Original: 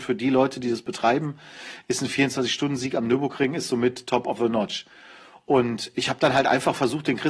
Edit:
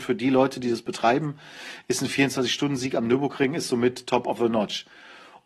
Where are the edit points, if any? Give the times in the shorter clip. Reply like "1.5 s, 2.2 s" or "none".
none